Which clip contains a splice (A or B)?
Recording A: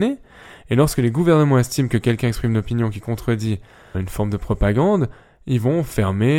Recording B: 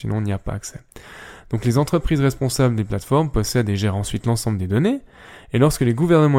A